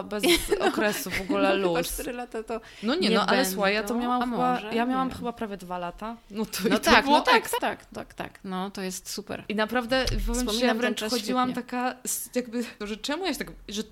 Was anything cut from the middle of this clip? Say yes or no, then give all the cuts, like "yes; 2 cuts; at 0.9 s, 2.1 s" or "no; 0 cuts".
yes; 2 cuts; at 7.6 s, 12.8 s